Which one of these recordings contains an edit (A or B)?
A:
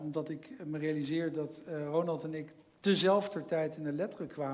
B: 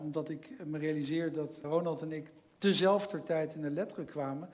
B